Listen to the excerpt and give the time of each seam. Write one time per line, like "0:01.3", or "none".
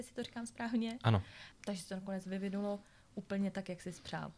0:01.5